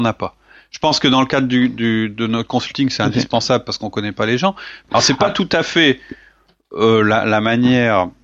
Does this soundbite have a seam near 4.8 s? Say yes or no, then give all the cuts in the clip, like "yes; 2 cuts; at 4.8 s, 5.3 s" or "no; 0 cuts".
yes; 1 cut; at 4.8 s